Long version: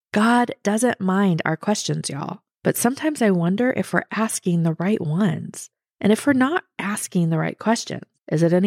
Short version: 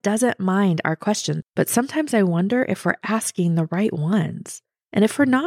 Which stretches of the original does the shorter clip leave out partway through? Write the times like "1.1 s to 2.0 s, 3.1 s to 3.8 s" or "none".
2.0 s to 2.5 s